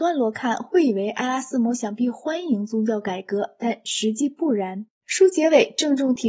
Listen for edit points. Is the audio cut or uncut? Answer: cut